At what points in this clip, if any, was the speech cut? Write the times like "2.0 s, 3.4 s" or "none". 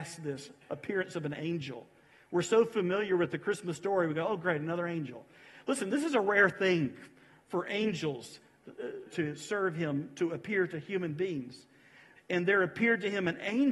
9.1 s, 12.2 s